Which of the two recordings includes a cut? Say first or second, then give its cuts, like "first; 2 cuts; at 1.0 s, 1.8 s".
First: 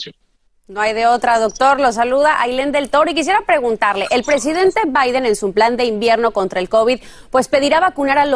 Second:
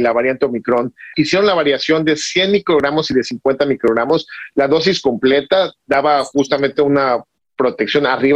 second; 1 cut; at 1.1 s